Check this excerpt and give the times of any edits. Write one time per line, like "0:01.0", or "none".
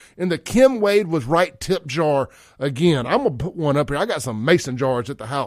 none

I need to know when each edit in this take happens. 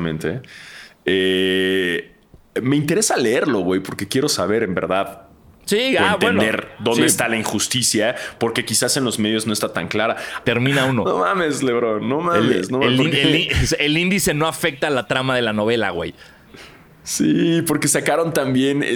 0:10.4

